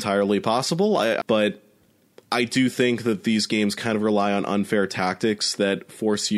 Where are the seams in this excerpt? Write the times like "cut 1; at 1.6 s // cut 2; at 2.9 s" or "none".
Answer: cut 1; at 1.2 s